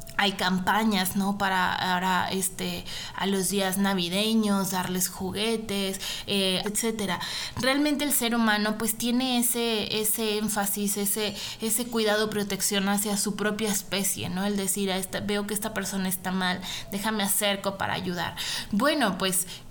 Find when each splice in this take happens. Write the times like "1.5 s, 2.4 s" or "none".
6.6 s